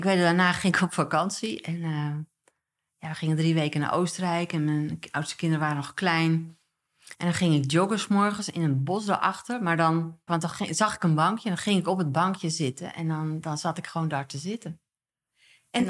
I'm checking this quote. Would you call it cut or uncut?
cut